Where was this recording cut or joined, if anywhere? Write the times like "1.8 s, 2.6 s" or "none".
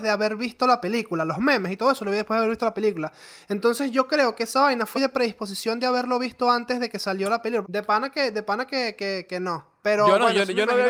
4.9 s, 7.6 s